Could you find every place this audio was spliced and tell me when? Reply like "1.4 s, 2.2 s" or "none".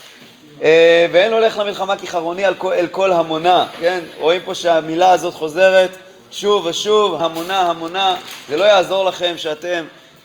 7.2 s